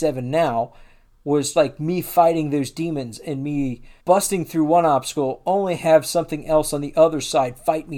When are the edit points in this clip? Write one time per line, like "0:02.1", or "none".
0:01.5
0:04.0